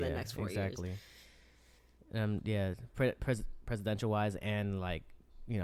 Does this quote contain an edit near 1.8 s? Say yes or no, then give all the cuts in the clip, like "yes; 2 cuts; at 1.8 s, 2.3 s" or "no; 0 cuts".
no; 0 cuts